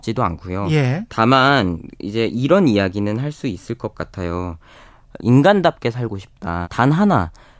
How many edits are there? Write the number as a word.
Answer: two